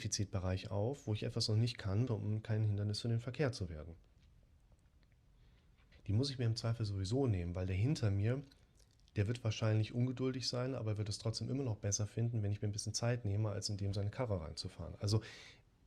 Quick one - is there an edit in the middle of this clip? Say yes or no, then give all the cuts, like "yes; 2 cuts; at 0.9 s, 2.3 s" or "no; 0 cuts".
yes; 2 cuts; at 2.1 s, 5.9 s